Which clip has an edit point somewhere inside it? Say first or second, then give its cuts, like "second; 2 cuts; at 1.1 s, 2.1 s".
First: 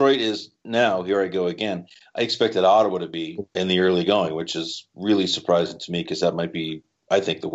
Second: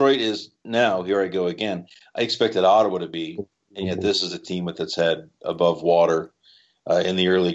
first; 1 cut; at 3.5 s